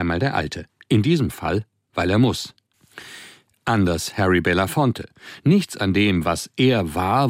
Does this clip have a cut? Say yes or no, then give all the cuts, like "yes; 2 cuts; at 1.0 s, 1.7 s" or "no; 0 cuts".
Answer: no; 0 cuts